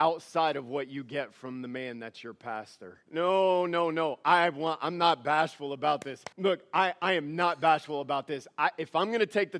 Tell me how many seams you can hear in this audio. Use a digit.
2